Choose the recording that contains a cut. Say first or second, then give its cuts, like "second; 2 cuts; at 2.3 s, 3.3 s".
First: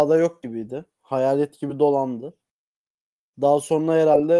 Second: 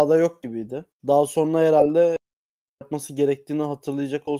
second; 1 cut; at 0.9 s